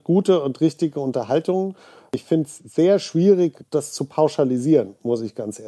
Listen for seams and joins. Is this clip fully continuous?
yes; 0 cuts

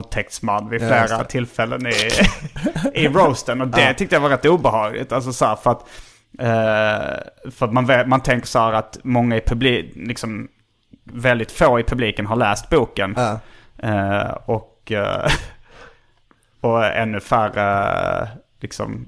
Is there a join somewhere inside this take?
no; 0 cuts

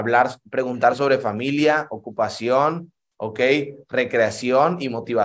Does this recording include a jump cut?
no; 0 cuts

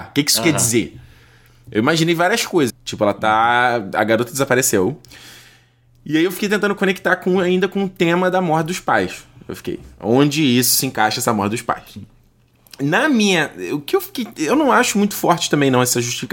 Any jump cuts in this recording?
yes; 1 cut; at 2.7 s

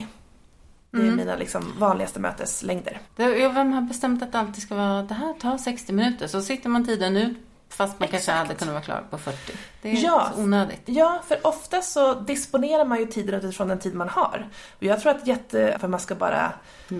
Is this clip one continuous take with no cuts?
no; 1 cut; at 15.7 s

